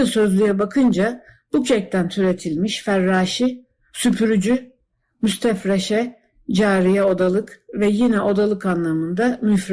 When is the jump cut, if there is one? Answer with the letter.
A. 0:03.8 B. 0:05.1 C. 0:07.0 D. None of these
D